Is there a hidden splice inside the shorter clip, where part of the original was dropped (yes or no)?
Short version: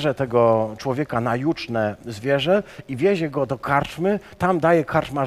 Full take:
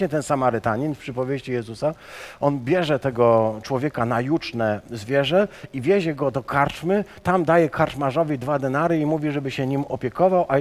no